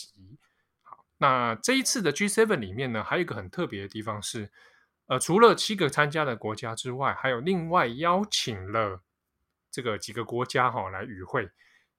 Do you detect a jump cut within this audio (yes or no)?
no